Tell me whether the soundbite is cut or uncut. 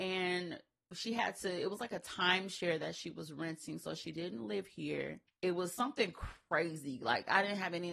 cut